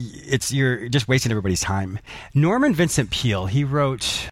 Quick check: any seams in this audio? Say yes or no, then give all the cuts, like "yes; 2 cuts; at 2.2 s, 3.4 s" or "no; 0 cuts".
no; 0 cuts